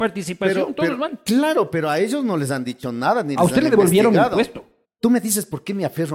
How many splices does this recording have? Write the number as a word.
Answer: one